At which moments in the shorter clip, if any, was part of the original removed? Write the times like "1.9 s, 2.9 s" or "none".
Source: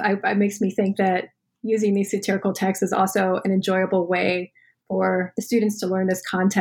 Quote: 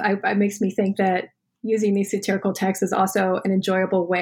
none